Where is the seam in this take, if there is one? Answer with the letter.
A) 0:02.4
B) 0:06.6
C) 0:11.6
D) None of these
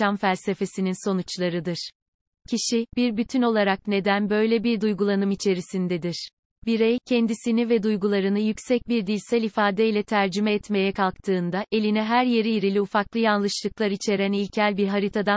A